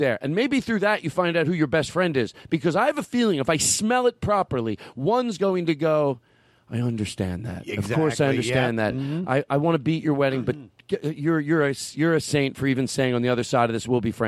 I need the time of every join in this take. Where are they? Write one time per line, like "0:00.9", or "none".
none